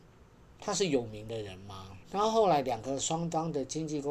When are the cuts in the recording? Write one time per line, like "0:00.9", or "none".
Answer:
0:02.0